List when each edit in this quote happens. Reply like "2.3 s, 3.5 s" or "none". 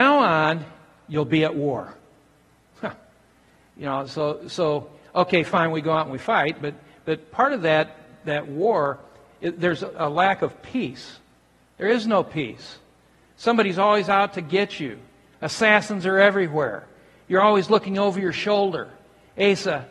9.9 s